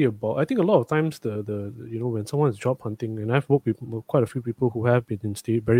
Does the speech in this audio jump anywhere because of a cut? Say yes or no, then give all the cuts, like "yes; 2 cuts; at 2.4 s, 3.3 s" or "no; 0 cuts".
no; 0 cuts